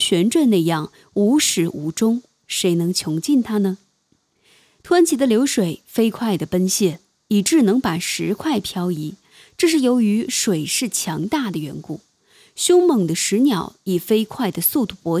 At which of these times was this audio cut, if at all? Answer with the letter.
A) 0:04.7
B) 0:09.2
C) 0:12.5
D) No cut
D